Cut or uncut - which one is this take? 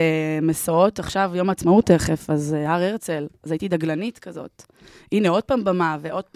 uncut